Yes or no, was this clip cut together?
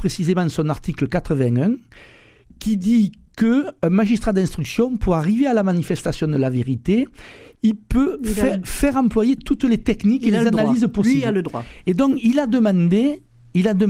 no